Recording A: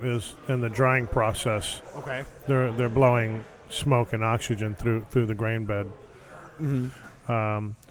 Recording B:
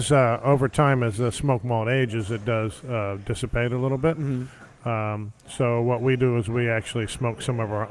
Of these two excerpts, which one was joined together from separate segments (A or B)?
A